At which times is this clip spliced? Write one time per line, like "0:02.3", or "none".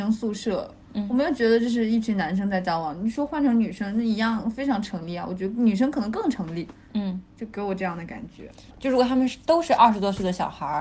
0:08.7